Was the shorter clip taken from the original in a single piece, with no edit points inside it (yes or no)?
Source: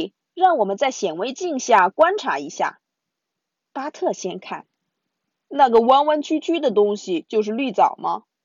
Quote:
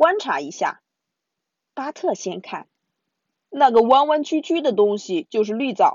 yes